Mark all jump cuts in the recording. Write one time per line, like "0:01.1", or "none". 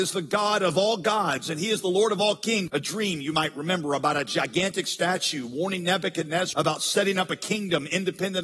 0:02.7
0:06.5